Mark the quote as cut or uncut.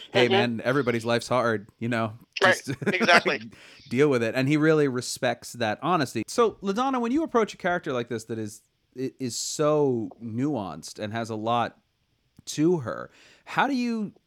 uncut